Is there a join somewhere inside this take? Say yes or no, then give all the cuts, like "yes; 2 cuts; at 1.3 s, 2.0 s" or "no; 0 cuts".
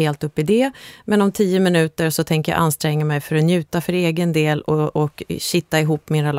no; 0 cuts